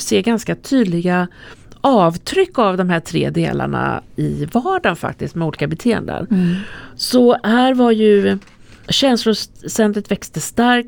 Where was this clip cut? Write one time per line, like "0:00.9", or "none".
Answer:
none